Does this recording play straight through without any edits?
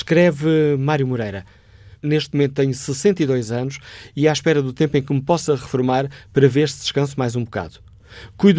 no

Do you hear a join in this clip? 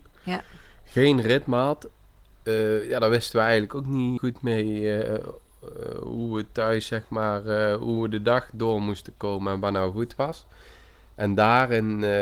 yes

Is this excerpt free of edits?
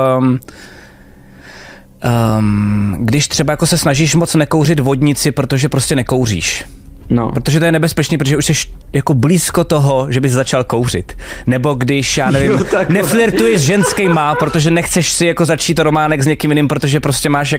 yes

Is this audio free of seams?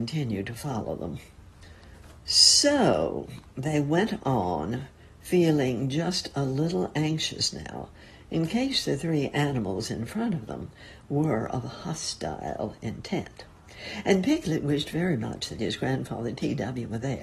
yes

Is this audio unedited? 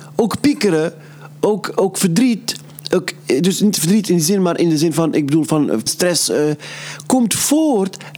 no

